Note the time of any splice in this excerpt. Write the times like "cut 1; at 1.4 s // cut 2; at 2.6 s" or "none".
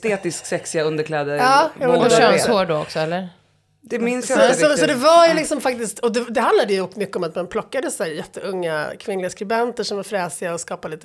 none